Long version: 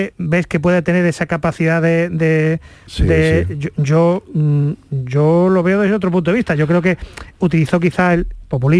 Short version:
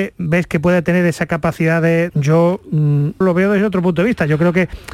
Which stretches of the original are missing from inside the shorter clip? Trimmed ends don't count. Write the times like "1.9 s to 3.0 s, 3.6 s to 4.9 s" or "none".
2.1 s to 3.7 s, 4.8 s to 5.5 s